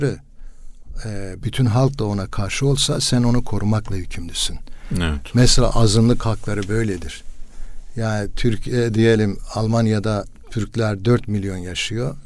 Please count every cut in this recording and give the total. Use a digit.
1